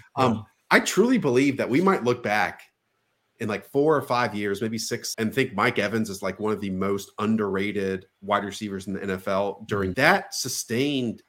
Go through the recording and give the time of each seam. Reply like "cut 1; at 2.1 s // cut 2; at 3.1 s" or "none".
cut 1; at 5.1 s // cut 2; at 9.9 s